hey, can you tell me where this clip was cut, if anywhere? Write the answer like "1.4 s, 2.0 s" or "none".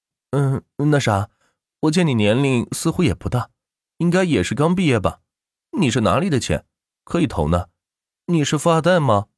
none

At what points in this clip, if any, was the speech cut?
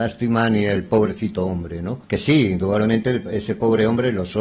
2.0 s

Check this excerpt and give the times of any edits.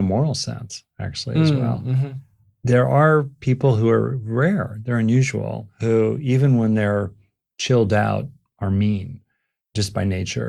none

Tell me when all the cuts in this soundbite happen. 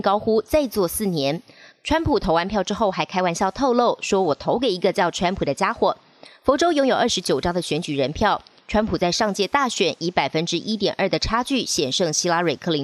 none

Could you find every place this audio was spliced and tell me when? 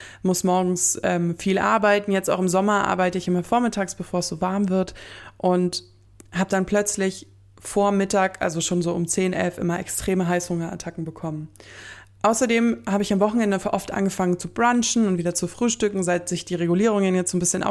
none

